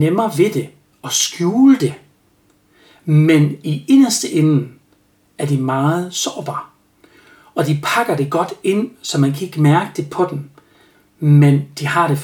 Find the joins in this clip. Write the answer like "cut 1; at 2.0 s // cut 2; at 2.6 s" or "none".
none

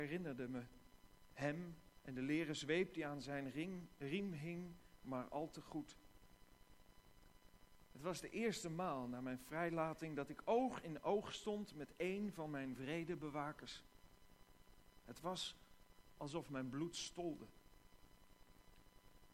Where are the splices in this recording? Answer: none

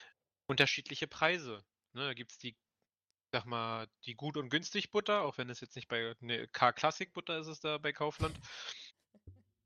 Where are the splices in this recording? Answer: none

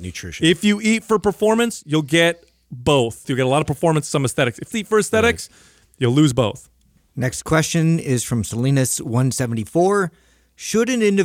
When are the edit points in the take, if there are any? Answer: cut 1; at 3.2 s // cut 2; at 4.7 s

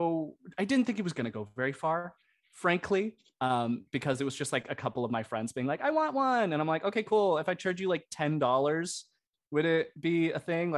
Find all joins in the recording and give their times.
none

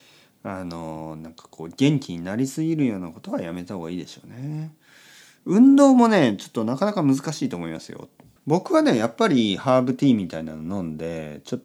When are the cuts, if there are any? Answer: cut 1; at 8.4 s

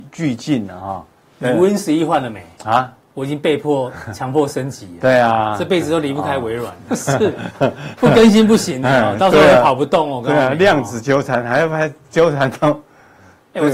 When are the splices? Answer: cut 1; at 6.9 s

